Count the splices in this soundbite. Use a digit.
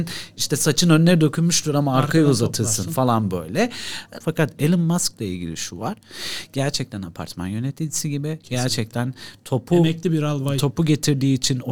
1